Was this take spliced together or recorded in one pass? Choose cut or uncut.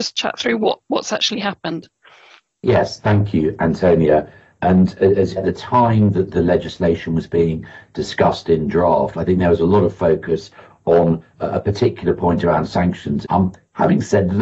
cut